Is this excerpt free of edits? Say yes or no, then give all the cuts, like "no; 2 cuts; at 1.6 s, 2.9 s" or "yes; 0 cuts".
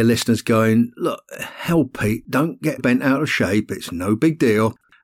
no; 1 cut; at 2.8 s